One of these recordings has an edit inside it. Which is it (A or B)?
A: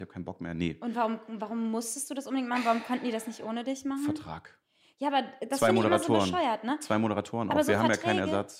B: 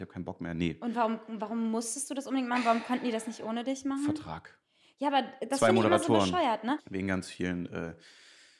B